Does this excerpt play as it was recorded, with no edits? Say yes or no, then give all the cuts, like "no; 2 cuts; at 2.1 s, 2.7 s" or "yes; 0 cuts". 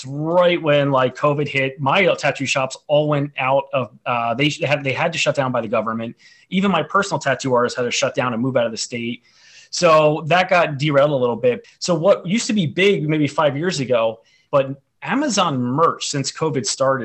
no; 2 cuts; at 11.6 s, 14.5 s